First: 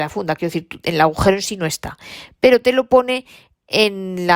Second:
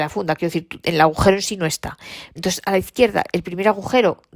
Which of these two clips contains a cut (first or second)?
second